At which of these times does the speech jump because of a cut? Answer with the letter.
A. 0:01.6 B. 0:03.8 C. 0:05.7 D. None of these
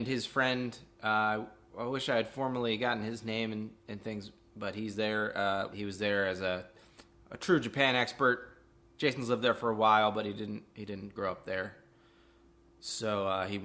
C